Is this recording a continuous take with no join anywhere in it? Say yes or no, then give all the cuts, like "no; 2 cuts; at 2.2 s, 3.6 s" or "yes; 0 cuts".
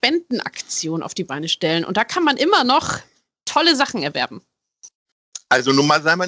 yes; 0 cuts